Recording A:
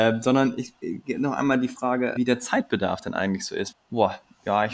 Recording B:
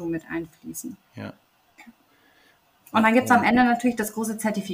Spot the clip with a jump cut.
A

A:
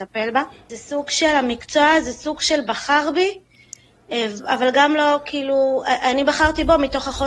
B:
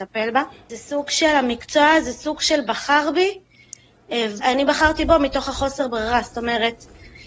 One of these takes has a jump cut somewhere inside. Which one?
B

